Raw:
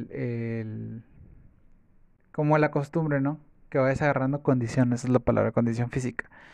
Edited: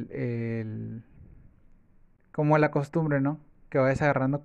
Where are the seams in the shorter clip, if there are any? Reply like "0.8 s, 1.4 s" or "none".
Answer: none